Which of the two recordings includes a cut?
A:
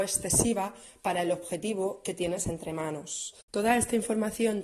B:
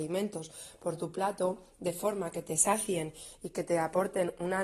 A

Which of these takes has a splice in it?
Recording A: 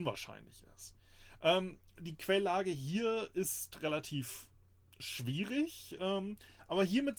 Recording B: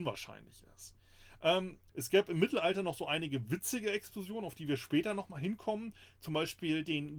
B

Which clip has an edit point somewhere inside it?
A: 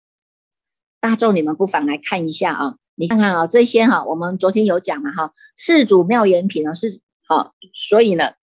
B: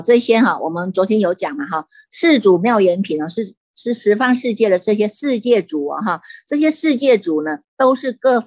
A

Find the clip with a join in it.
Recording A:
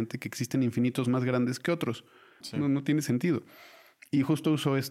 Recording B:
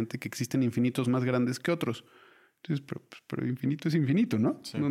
A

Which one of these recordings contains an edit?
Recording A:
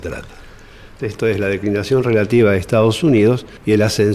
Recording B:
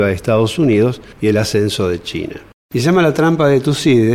A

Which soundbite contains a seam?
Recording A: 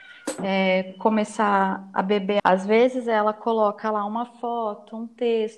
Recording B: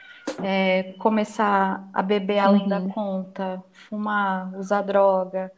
A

